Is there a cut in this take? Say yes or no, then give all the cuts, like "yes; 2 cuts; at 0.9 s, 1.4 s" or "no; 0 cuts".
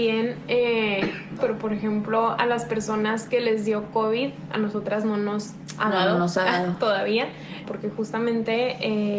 yes; 2 cuts; at 1.4 s, 7.6 s